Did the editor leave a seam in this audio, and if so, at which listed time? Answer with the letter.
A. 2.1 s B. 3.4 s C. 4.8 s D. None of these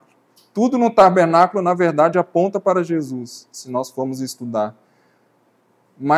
D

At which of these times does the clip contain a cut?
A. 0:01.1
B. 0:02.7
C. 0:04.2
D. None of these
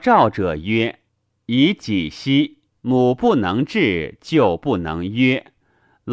B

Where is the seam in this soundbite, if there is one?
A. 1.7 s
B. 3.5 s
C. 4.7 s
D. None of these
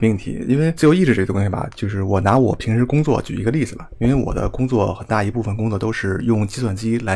D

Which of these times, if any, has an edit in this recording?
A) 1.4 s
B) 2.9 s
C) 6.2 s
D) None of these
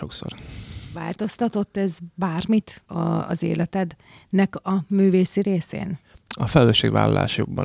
B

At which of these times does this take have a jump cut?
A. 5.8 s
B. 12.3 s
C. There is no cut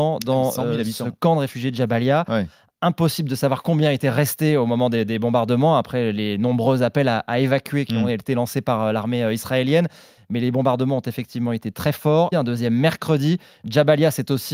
B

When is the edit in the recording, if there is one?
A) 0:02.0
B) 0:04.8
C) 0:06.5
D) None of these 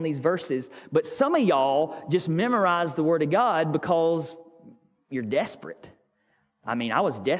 D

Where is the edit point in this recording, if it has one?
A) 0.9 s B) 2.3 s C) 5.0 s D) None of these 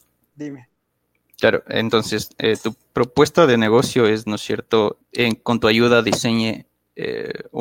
C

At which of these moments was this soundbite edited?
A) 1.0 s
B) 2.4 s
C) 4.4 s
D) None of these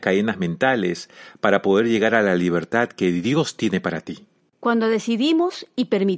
C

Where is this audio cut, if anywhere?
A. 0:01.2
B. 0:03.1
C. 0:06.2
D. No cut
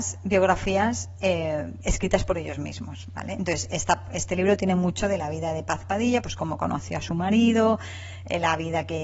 D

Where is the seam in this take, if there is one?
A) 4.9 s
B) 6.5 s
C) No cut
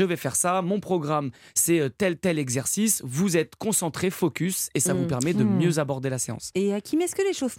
C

